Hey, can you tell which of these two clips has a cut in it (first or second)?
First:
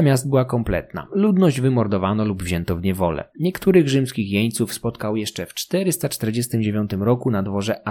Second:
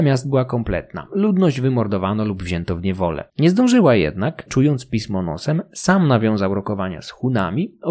second